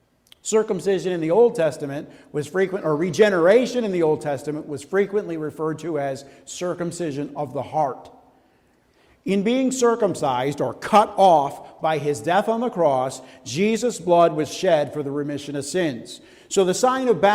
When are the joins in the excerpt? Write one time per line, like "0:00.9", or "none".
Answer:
none